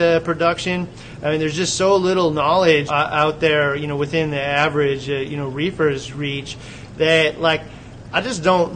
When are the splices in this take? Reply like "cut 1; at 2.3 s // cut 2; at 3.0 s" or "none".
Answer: cut 1; at 2.9 s